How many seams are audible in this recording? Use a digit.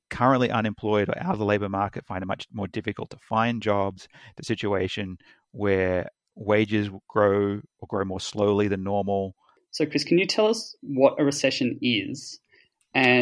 1